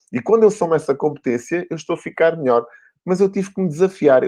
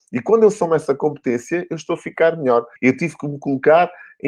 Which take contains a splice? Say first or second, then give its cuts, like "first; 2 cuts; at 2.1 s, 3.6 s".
second; 1 cut; at 2.8 s